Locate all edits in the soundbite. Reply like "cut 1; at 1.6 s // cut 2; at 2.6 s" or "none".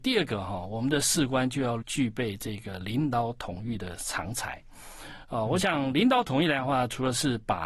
cut 1; at 1.8 s